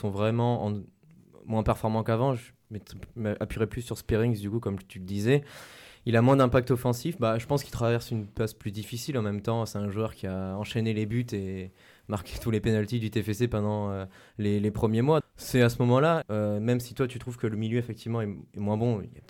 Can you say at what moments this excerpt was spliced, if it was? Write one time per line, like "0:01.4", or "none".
0:15.2
0:16.2